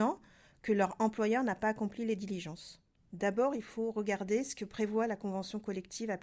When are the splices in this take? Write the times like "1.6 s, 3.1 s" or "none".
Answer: 3.0 s